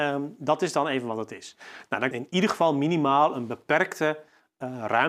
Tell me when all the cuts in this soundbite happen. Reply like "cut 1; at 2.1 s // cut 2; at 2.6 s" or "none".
cut 1; at 2.1 s